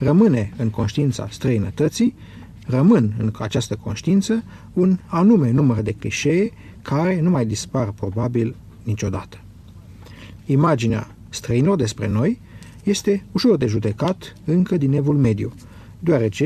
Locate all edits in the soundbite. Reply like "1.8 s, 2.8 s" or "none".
10.4 s